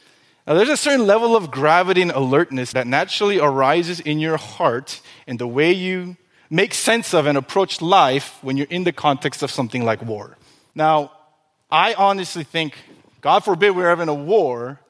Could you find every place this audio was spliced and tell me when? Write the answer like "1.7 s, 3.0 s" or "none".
2.7 s, 10.7 s